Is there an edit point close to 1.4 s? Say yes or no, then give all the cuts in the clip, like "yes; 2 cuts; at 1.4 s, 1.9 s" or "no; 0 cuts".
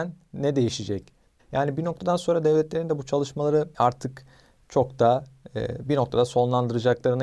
yes; 1 cut; at 1.4 s